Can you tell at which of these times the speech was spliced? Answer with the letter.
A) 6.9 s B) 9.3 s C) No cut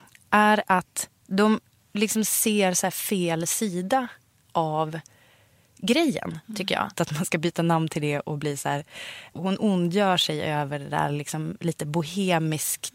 A